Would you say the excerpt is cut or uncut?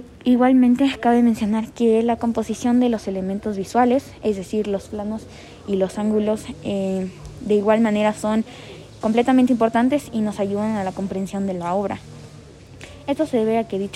cut